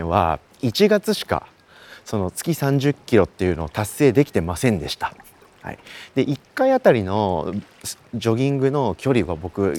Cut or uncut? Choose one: uncut